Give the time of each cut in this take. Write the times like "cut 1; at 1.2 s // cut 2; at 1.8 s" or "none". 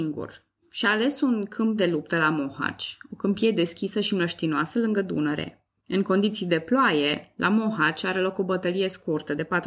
cut 1; at 5.8 s